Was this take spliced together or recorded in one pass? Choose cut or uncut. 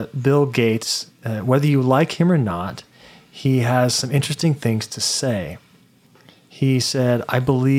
uncut